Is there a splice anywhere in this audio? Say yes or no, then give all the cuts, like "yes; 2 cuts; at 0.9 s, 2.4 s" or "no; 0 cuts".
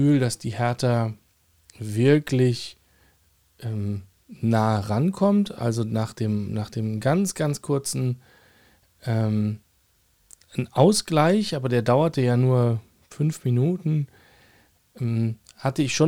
no; 0 cuts